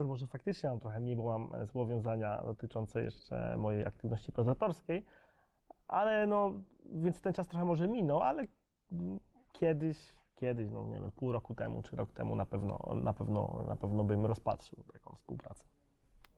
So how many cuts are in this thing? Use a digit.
0